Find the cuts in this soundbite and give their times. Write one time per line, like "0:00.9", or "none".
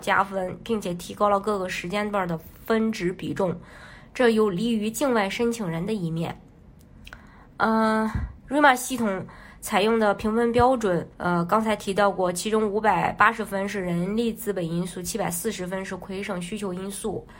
0:11.1